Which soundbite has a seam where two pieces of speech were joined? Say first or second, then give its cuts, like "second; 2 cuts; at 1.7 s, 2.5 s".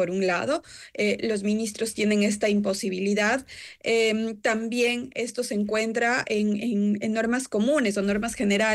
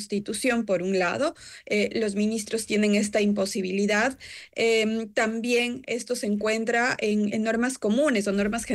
second; 1 cut; at 7.3 s